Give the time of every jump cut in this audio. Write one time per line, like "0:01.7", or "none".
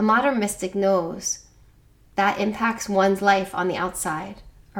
none